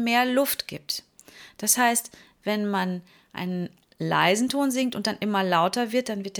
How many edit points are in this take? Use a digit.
0